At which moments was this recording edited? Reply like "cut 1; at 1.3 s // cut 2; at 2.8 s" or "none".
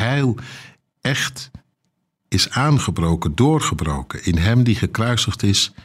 none

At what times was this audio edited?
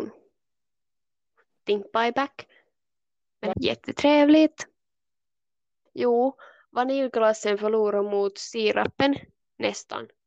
cut 1; at 3.5 s // cut 2; at 5.9 s

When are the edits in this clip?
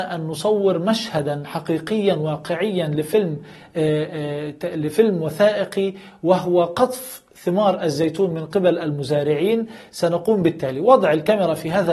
none

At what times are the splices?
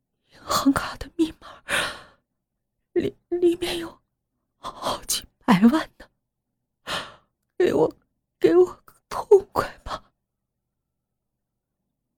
cut 1; at 7.4 s // cut 2; at 9.0 s

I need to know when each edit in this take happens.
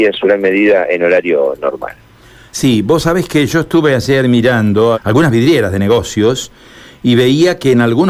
cut 1; at 4.9 s

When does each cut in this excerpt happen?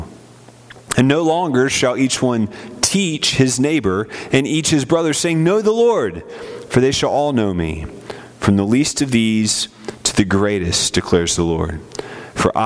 none

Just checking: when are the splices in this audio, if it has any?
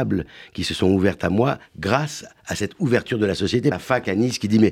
cut 1; at 3.7 s

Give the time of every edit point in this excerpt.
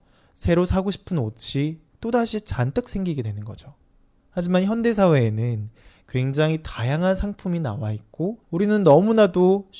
cut 1; at 4.2 s // cut 2; at 8.4 s

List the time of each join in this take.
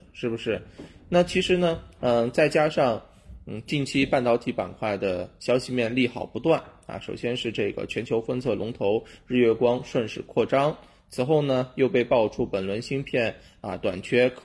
none

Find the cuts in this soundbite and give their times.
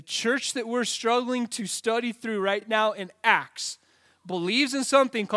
none

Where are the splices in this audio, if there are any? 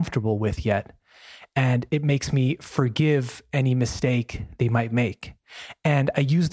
none

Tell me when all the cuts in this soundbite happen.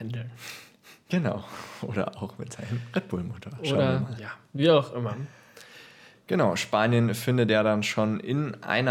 cut 1; at 6.1 s

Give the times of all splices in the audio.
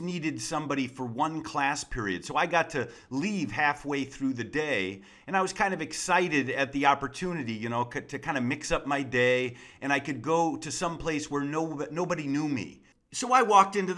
none

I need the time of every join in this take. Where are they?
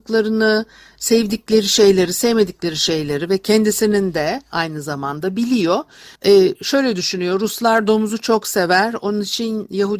cut 1; at 6.2 s

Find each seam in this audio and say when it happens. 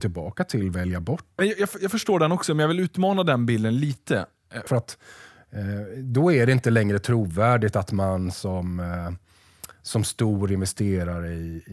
cut 1; at 1.4 s // cut 2; at 4.7 s

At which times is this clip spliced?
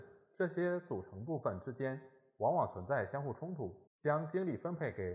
cut 1; at 3.9 s

